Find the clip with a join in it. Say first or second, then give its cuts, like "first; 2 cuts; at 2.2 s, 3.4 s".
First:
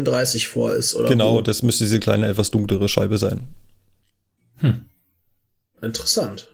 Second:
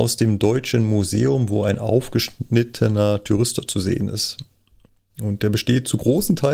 first; 1 cut; at 4.4 s